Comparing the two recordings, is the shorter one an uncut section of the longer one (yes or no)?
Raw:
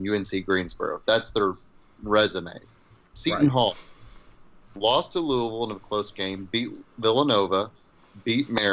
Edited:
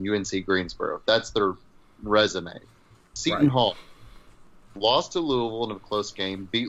yes